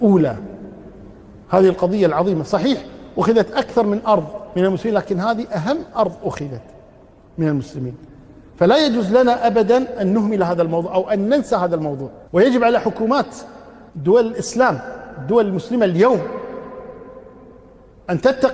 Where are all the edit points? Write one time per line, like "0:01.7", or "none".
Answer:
0:12.3
0:13.9